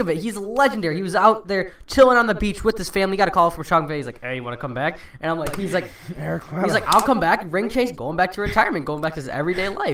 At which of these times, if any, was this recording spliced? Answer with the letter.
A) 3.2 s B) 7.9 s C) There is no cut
B